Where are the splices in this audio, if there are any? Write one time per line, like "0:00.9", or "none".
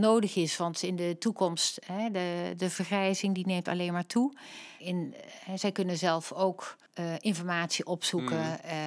0:04.8
0:06.9